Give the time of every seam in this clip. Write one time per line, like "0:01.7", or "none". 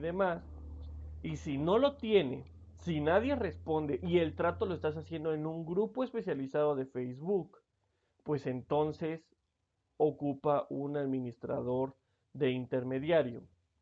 none